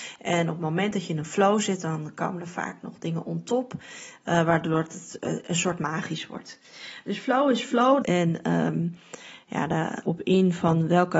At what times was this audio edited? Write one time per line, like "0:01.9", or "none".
0:08.0
0:10.0